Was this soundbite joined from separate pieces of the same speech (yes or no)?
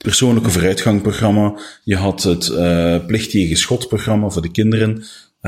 no